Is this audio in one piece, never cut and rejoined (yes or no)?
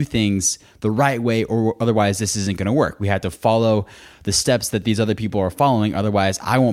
yes